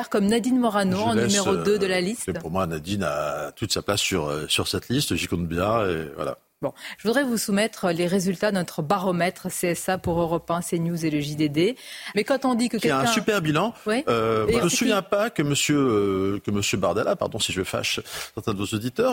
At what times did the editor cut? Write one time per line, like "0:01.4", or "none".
0:07.0
0:12.1
0:14.6